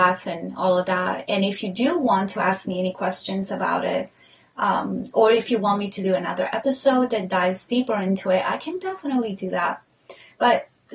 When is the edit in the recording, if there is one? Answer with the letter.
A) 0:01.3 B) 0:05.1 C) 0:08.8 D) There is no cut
D